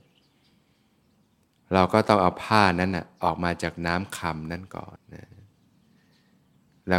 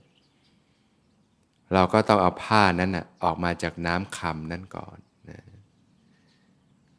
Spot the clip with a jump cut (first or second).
first